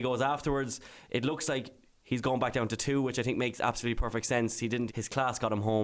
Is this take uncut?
no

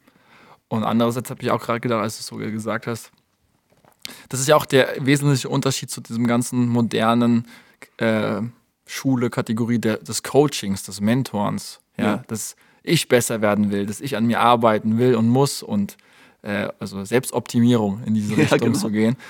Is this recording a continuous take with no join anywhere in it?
yes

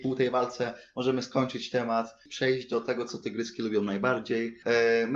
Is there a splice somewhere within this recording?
no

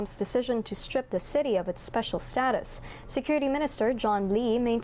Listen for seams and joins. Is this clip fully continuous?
yes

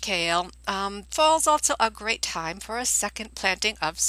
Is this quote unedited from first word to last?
no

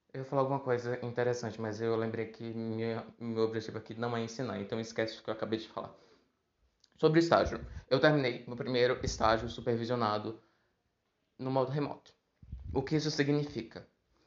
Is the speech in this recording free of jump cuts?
yes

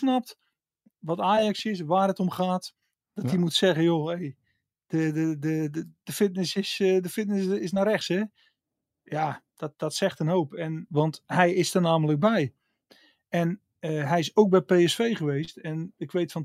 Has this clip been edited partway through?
yes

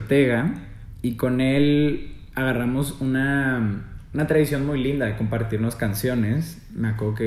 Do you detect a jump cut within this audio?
no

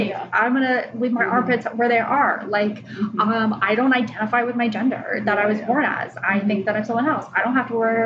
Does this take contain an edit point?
no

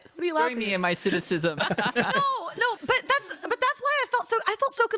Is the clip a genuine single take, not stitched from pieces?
no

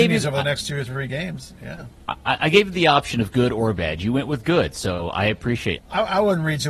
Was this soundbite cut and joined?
yes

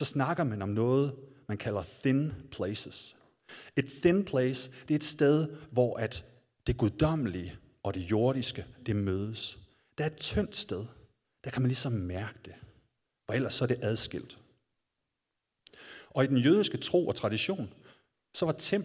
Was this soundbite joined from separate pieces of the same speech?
no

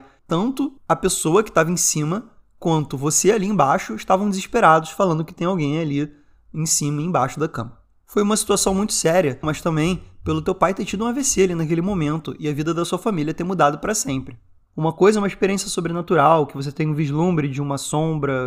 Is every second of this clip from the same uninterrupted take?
no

